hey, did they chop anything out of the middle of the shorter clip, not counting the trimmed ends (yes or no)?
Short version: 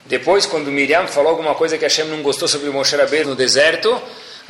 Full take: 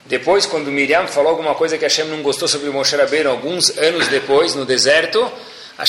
yes